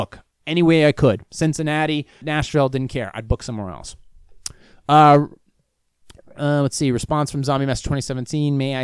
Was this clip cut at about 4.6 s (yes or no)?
no